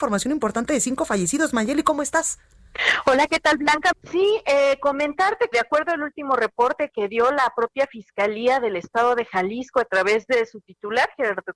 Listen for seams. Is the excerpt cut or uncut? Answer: cut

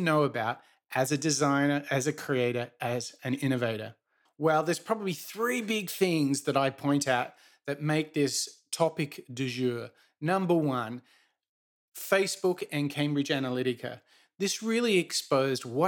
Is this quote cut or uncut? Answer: cut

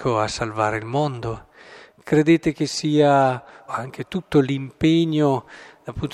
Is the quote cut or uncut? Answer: cut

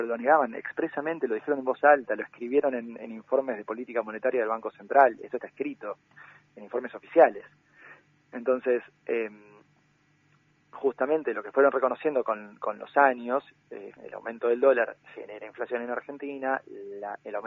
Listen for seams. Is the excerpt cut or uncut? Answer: cut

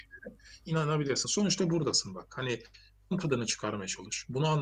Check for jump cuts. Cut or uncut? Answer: uncut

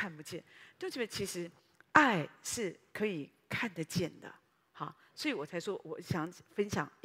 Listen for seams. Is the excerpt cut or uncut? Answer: uncut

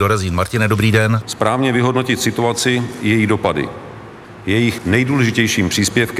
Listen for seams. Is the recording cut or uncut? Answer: cut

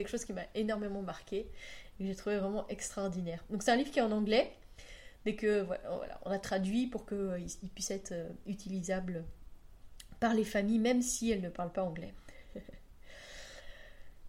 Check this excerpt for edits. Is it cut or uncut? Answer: uncut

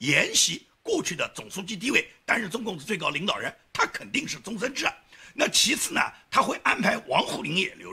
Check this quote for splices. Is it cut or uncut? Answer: uncut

